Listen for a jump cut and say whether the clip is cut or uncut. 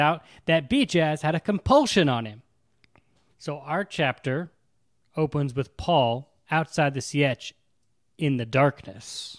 cut